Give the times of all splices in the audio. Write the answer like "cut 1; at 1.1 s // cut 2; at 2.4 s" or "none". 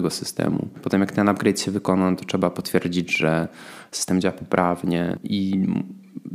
cut 1; at 5.2 s